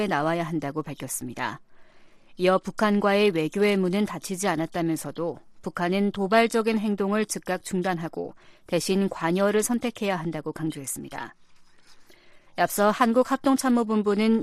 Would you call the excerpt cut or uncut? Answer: cut